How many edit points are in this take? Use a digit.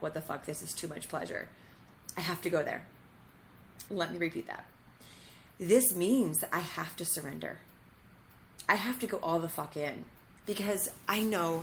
3